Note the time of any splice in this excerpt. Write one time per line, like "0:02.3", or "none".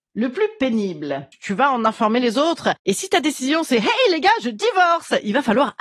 0:01.3

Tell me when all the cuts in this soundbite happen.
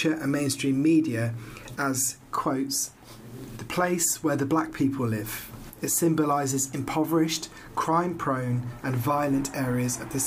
0:08.8

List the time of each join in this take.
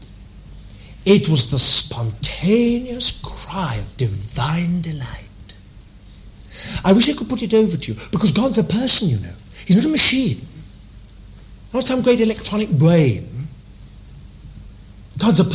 0:01.0

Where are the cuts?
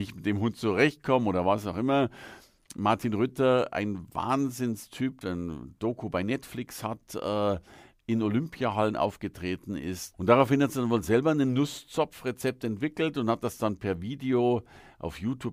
0:05.2
0:10.1

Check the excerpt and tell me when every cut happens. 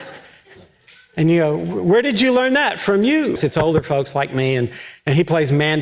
0:03.4

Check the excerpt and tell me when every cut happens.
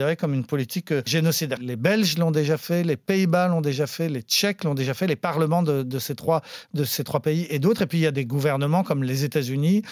0:01.6

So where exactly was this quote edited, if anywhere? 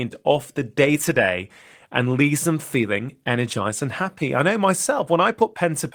none

